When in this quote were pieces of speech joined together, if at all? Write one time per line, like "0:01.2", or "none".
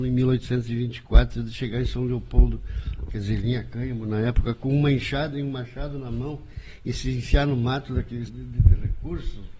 0:08.3